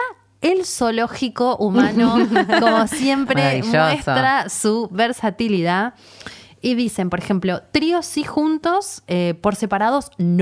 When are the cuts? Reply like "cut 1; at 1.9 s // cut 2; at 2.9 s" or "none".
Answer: none